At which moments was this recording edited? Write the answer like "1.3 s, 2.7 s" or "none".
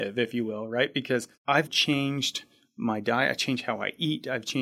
1.7 s